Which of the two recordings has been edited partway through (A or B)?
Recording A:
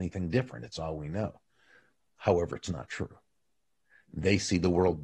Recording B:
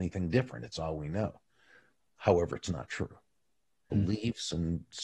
B